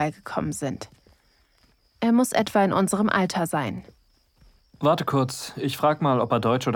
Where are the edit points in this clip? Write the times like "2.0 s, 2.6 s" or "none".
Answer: none